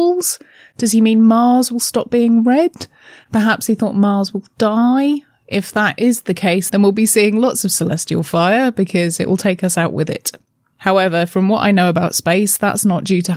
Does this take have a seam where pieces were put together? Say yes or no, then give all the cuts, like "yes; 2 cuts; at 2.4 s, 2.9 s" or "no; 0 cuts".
no; 0 cuts